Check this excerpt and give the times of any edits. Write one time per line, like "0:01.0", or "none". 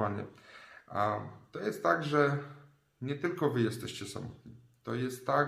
none

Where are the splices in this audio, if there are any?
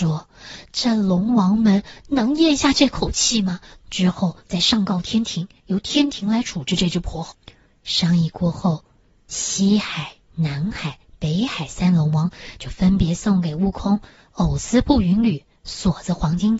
0:03.8

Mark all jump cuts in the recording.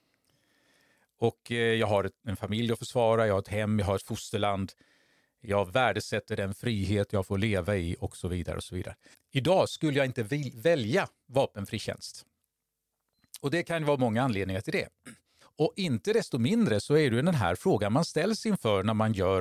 0:09.1
0:15.4

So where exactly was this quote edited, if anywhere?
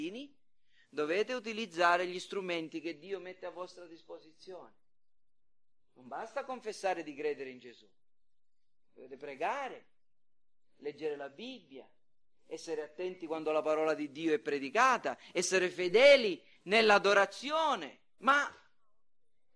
0:18.2

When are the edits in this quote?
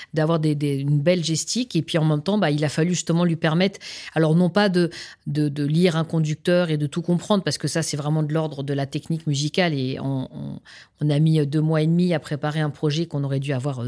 none

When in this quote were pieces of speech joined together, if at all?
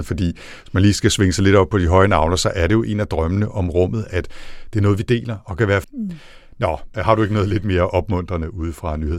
0:05.8
0:06.9

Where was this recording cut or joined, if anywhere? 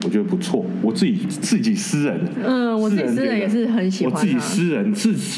0:01.2

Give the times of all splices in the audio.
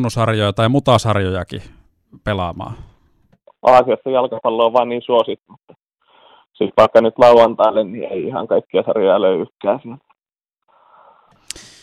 0:03.5
0:05.5

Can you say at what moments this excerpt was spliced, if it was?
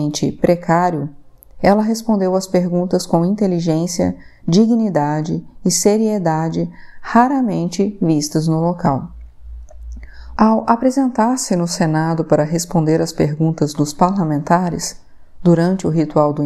0:10.4

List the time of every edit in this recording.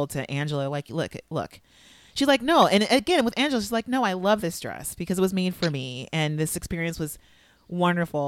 none

